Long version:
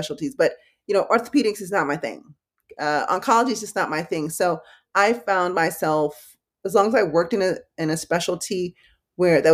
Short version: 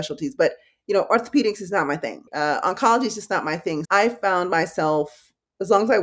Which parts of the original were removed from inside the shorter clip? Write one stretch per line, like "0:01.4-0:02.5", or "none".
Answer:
0:02.3-0:02.7
0:04.3-0:04.9